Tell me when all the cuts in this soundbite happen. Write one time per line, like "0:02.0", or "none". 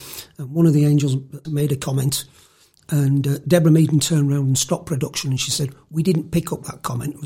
0:01.4